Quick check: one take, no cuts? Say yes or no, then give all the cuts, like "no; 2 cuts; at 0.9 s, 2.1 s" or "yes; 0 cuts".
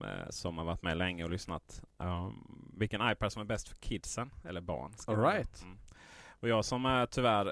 yes; 0 cuts